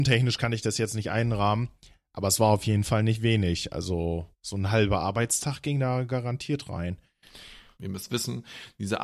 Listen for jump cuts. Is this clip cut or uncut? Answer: cut